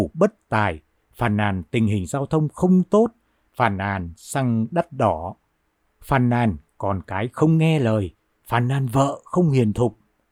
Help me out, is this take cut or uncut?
uncut